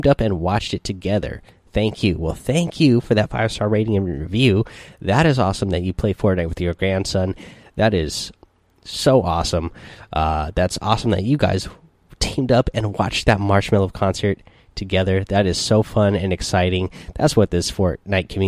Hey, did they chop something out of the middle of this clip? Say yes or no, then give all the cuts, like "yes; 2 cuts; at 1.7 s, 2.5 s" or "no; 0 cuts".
no; 0 cuts